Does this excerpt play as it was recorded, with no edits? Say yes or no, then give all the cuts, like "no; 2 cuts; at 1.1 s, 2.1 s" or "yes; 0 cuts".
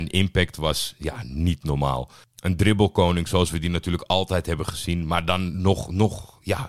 yes; 0 cuts